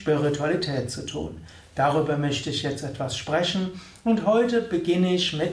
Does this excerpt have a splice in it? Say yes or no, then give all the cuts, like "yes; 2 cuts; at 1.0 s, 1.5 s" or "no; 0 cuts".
no; 0 cuts